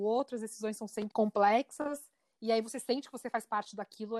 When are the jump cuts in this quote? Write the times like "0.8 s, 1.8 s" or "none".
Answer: 1.1 s